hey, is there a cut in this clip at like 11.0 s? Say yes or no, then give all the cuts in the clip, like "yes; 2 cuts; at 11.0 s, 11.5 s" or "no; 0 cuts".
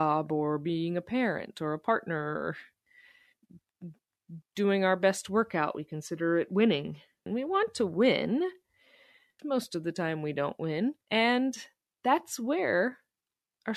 yes; 3 cuts; at 7.3 s, 9.4 s, 11.0 s